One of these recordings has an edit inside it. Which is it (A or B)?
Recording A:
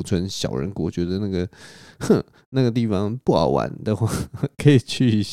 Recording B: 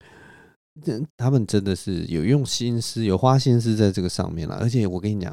B